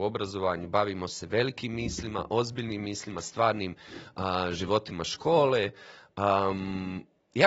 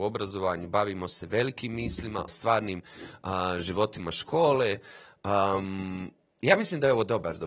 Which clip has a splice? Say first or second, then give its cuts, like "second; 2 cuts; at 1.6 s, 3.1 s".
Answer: second; 1 cut; at 2.3 s